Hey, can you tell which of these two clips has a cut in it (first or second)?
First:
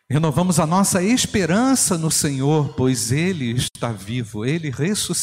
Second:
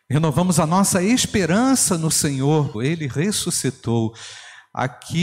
second